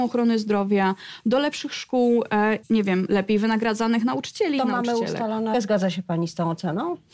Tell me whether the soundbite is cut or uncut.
cut